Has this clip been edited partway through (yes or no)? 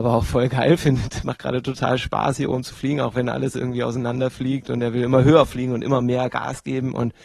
yes